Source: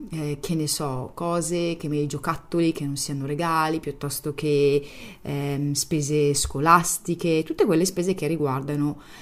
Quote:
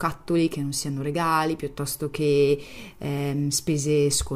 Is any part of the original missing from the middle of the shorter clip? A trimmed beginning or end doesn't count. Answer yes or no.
no